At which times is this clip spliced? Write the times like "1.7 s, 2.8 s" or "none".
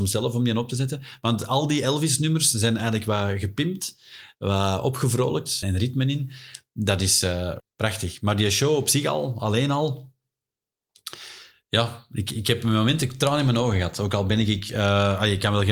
5.6 s, 7.6 s